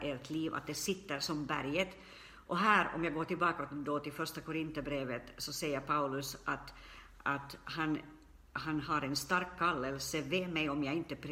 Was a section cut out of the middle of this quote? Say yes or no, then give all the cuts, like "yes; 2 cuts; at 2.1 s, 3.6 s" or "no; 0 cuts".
no; 0 cuts